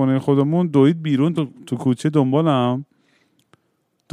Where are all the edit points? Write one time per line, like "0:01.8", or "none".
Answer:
none